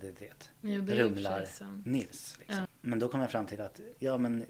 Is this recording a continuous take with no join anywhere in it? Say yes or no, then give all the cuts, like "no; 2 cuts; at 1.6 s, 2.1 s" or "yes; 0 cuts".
no; 1 cut; at 2.6 s